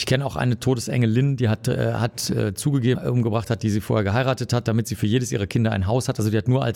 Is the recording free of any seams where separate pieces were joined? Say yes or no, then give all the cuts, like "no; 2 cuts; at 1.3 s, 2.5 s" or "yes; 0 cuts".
no; 1 cut; at 2.9 s